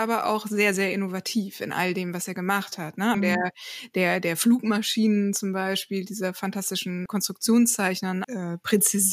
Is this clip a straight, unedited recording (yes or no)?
no